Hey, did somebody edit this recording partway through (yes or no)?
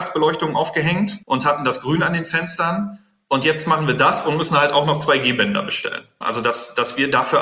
yes